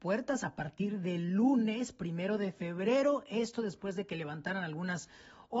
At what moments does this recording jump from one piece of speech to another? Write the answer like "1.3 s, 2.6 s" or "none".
none